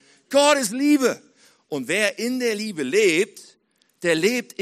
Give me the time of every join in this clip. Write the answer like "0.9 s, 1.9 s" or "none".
none